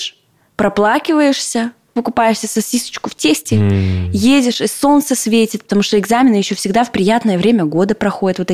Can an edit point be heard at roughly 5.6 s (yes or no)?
no